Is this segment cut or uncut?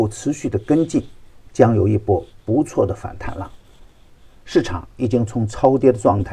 uncut